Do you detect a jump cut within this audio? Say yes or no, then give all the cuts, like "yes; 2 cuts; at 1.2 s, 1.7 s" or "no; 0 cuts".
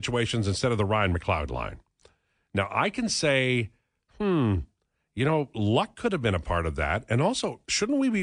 no; 0 cuts